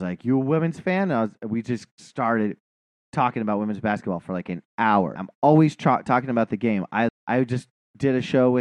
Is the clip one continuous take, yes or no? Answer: no